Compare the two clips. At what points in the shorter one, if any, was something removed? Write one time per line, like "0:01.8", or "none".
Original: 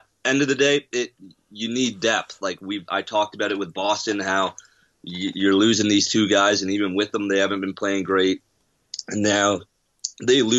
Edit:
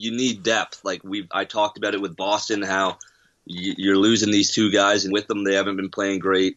0:05.1